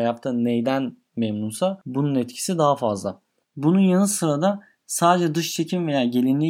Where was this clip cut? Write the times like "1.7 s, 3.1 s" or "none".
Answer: 3.4 s